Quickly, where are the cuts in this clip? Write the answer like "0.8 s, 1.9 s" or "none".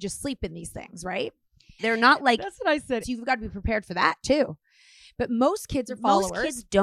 1.8 s, 3.0 s